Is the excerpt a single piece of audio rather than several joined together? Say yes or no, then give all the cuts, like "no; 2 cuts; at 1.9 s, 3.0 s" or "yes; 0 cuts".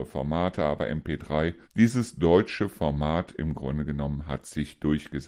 no; 1 cut; at 1.6 s